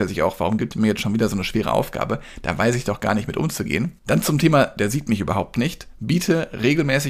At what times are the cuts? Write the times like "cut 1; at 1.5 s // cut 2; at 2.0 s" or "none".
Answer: cut 1; at 4.0 s

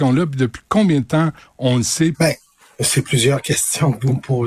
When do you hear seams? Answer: cut 1; at 2.1 s

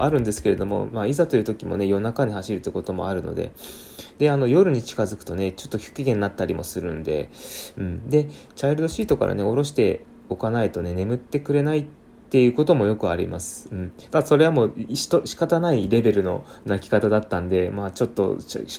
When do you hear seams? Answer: cut 1; at 14.1 s

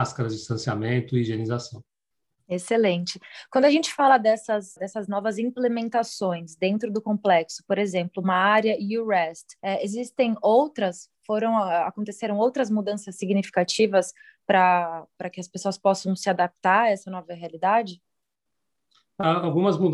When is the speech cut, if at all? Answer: cut 1; at 9.6 s

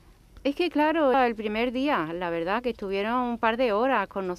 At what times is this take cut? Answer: cut 1; at 1.1 s

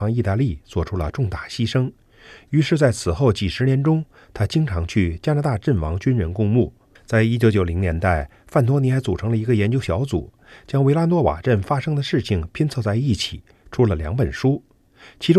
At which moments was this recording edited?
cut 1; at 7.0 s

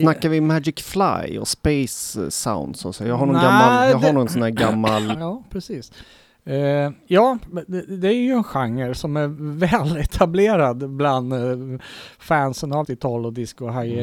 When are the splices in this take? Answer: cut 1; at 5.1 s // cut 2; at 12.8 s

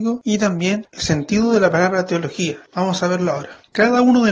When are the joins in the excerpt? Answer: cut 1; at 2.7 s

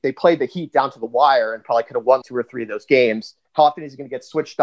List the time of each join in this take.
cut 1; at 2.2 s // cut 2; at 3.4 s

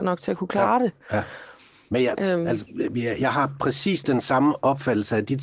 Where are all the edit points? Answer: none

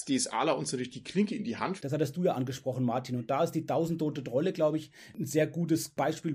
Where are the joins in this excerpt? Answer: cut 1; at 1.8 s

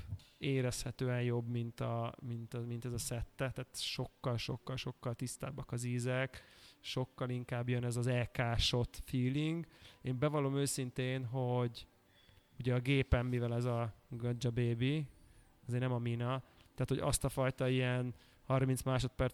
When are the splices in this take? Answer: none

